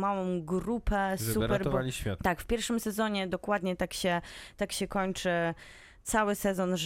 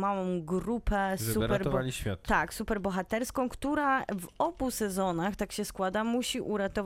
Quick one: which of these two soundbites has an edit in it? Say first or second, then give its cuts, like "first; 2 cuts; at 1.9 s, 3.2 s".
first; 1 cut; at 2.2 s